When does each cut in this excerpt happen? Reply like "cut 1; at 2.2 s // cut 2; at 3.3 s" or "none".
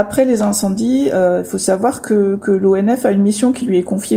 none